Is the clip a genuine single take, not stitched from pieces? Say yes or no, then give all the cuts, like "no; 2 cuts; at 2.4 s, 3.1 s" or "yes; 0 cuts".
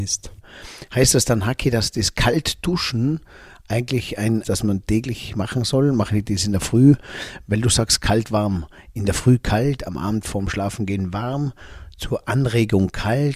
no; 1 cut; at 4.4 s